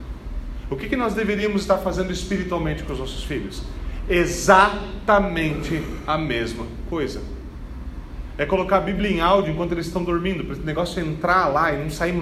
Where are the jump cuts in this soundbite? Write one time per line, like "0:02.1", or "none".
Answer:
none

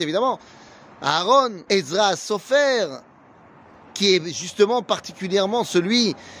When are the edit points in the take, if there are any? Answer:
0:01.7

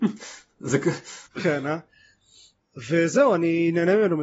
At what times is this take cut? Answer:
0:01.3

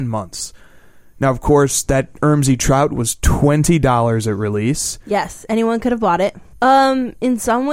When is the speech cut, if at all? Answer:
0:01.2
0:06.5

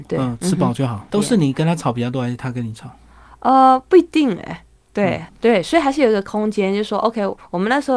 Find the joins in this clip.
0:01.1
0:05.3

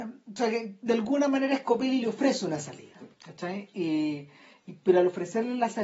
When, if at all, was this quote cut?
0:03.1

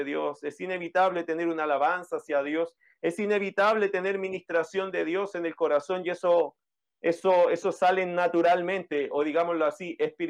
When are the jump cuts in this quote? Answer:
none

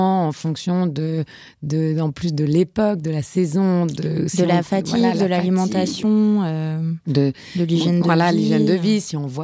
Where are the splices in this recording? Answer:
none

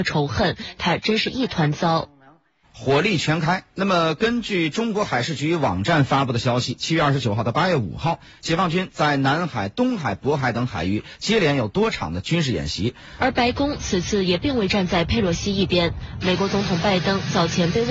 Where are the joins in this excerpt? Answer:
0:02.6
0:13.2

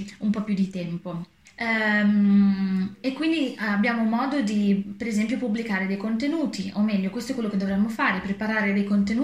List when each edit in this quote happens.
0:01.4

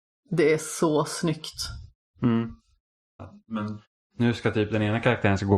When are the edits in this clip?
0:03.2

